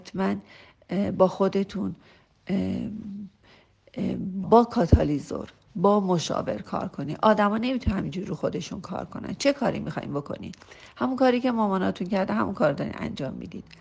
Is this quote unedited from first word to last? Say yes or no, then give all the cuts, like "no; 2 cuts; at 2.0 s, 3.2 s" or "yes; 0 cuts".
no; 1 cut; at 4.4 s